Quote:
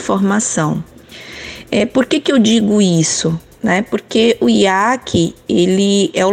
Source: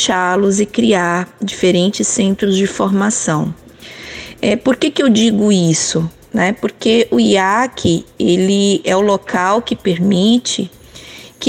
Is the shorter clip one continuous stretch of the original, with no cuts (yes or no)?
yes